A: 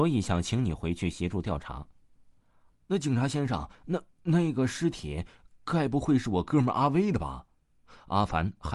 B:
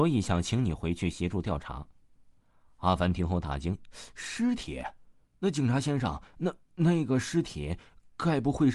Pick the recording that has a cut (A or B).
A